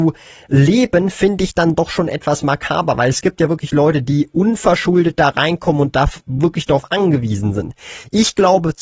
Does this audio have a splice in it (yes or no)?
no